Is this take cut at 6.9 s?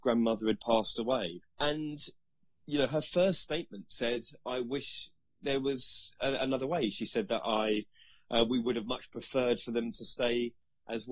no; 1 cut; at 1.4 s

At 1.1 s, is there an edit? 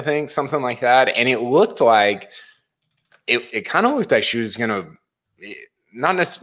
no; 1 cut; at 3.5 s

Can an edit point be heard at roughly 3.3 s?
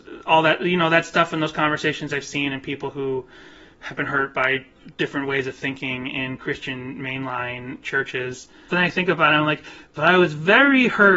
no; 1 cut; at 8.7 s

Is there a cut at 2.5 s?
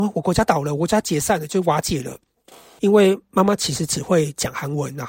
no; 0 cuts

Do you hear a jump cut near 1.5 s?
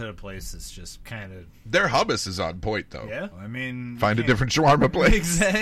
no; 1 cut; at 3.3 s

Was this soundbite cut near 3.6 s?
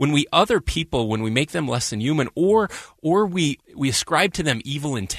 yes; 1 cut; at 3.6 s

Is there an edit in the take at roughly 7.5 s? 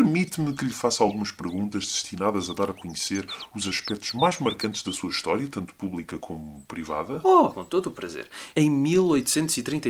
yes; 2 cuts; at 7.5 s, 8.5 s

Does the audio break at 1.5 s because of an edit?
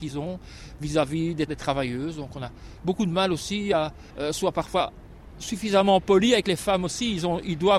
yes; 2 cuts; at 1.5 s, 4.1 s

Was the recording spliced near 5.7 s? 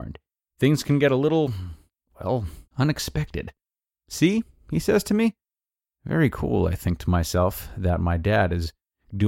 no; 1 cut; at 4.0 s

